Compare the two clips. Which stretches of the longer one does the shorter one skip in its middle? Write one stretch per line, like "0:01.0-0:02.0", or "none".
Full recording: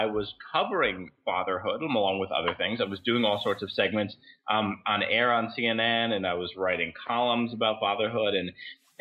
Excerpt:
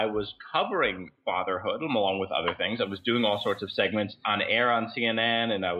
0:04.2-0:04.8

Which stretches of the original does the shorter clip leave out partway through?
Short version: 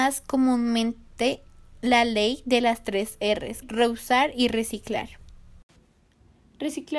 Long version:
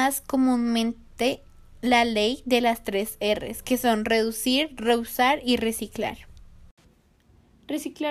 0:03.6-0:04.7

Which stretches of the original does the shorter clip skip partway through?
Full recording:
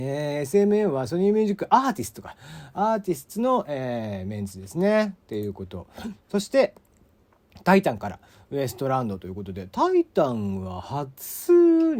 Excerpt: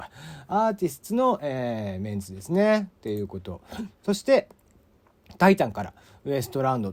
none

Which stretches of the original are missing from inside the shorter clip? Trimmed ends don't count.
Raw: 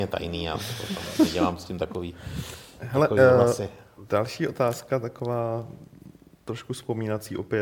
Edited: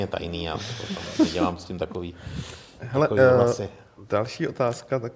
none

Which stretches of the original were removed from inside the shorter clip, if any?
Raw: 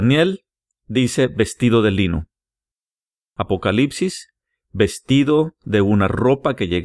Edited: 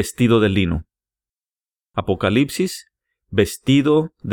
none

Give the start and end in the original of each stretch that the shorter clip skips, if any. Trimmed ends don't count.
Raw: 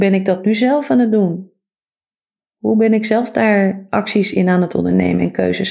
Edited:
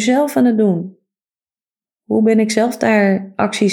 none

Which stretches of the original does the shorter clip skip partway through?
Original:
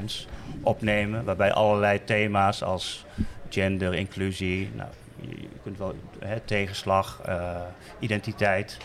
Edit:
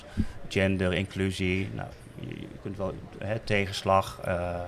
none

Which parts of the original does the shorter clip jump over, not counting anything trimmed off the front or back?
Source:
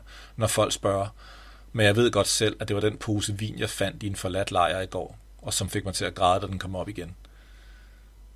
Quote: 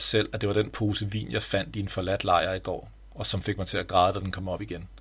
none

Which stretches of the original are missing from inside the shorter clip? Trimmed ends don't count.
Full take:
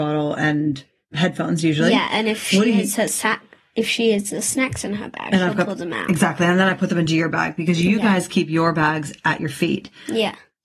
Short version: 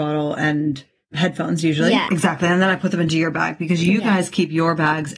0:02.1-0:06.1

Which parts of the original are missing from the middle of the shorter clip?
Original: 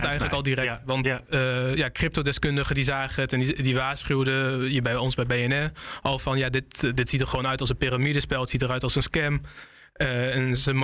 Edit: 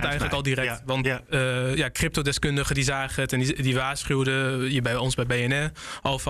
none

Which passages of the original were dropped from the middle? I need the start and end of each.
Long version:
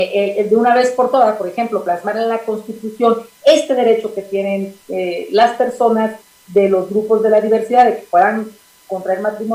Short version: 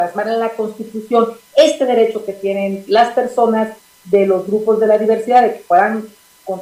0:04.8-0:05.3

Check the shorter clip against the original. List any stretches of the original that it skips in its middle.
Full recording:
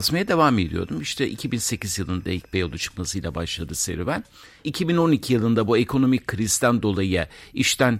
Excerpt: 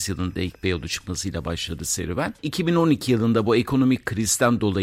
0:04.3-0:04.6

